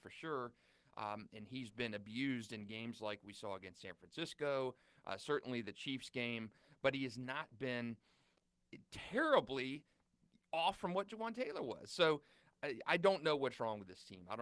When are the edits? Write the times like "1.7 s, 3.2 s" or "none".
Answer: none